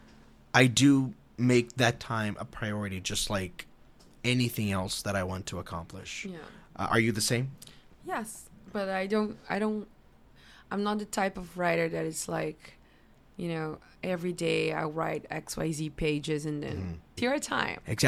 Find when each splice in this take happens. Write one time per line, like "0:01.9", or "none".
0:17.2